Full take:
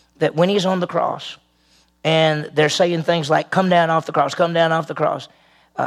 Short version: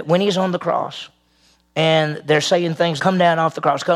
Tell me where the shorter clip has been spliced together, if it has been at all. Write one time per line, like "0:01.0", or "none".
0:03.0